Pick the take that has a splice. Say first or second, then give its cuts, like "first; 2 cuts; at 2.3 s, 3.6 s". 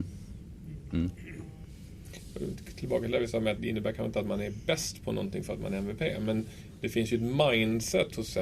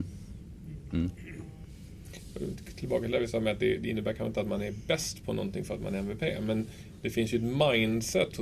first; 1 cut; at 3.6 s